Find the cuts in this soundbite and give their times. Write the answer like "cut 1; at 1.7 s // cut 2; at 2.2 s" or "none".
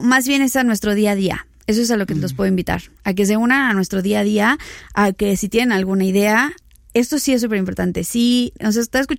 none